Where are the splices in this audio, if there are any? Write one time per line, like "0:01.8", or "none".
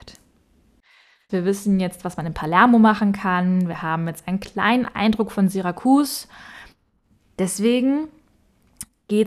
0:01.3